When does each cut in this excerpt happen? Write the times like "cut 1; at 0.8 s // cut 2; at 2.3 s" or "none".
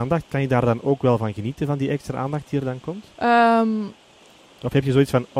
cut 1; at 3.1 s